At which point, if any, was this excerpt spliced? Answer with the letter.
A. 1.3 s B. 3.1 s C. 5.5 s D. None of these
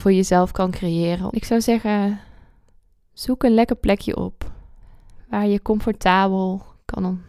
A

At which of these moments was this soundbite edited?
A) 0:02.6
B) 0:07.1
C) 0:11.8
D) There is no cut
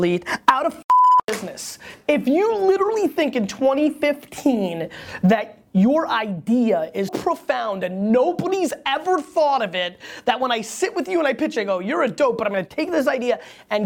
B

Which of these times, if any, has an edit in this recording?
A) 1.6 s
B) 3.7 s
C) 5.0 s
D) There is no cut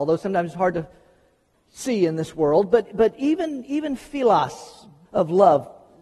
C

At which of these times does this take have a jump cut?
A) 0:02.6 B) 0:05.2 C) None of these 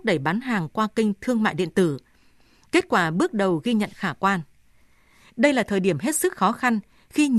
B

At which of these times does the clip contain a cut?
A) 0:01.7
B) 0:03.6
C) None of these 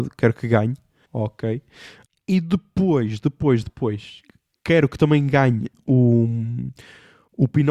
B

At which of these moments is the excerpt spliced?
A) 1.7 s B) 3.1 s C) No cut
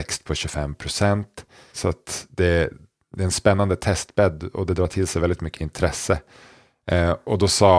A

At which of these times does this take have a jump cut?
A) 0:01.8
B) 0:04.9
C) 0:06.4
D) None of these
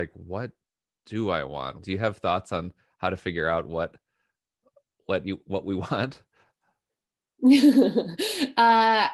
A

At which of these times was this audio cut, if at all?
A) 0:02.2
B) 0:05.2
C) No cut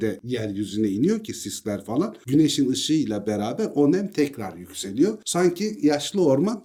C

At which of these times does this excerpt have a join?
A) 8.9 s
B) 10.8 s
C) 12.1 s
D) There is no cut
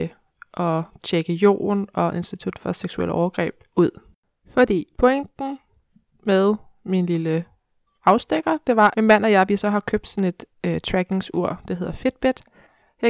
A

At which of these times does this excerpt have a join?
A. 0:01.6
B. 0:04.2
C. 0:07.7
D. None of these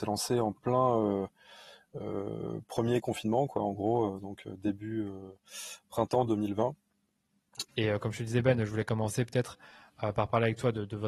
C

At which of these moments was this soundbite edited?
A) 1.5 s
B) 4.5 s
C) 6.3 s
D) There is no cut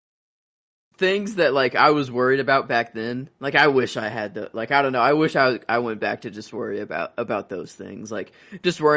D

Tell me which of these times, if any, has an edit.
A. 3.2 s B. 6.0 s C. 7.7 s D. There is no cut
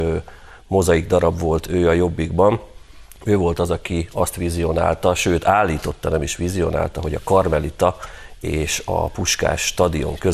D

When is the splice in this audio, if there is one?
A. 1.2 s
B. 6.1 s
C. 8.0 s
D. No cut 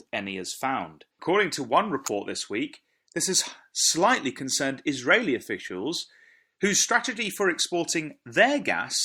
A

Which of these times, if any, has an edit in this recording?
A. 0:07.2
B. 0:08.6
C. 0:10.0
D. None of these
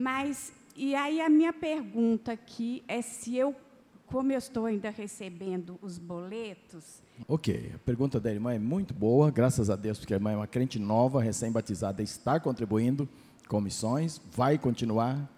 A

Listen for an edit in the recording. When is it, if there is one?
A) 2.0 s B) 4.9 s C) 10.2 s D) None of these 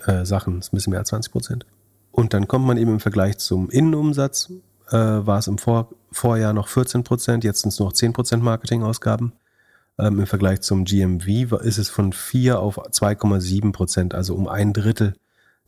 D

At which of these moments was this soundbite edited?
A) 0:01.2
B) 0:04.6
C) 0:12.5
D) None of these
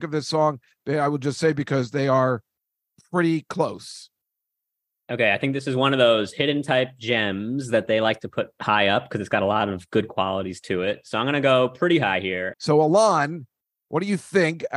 C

